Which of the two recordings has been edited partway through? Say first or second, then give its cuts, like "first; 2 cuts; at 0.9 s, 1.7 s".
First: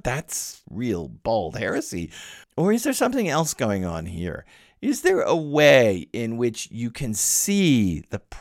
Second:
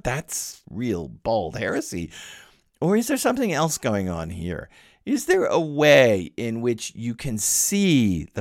first; 1 cut; at 2.4 s